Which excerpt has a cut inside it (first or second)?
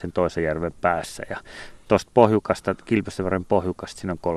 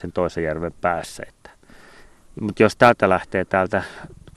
second